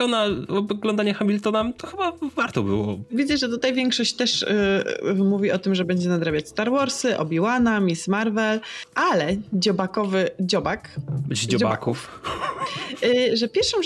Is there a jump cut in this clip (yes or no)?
no